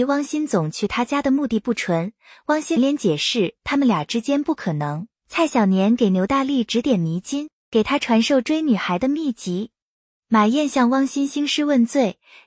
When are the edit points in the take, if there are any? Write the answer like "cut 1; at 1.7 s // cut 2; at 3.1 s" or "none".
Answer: cut 1; at 2.8 s // cut 2; at 5.2 s